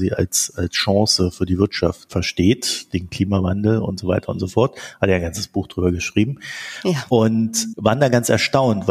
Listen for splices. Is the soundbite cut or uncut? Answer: uncut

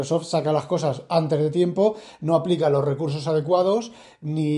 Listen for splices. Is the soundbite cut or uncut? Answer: uncut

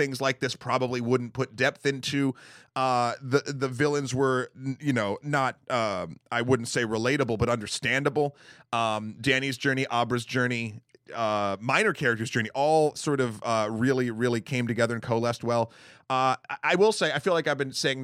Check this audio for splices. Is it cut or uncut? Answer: uncut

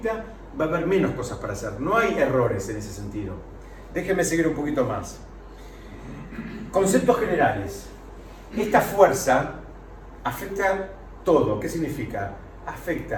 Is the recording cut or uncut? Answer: uncut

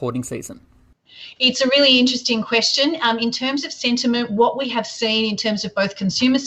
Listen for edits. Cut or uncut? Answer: uncut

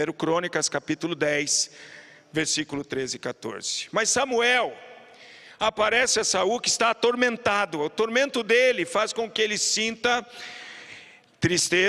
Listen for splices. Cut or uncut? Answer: uncut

